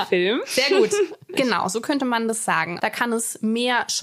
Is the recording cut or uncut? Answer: cut